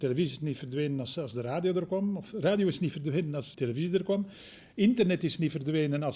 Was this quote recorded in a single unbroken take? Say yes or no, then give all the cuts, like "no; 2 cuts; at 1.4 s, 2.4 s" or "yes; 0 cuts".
no; 1 cut; at 3.5 s